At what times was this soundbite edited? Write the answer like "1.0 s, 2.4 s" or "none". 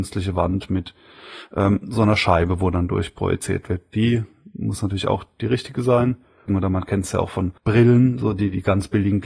6.5 s, 7.6 s